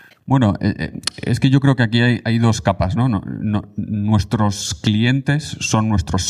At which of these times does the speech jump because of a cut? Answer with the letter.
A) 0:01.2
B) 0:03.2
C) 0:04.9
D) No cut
D